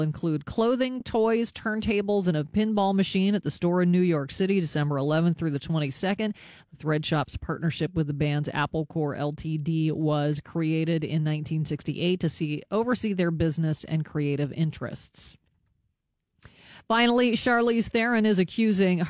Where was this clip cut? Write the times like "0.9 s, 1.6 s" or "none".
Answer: none